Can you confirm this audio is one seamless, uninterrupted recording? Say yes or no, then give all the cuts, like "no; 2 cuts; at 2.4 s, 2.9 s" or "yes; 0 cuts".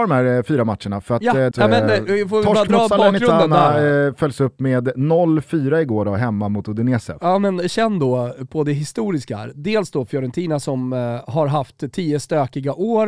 no; 1 cut; at 1.5 s